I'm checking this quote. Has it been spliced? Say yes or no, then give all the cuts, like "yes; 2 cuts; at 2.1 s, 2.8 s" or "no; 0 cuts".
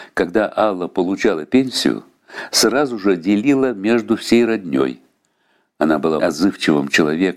yes; 1 cut; at 6.2 s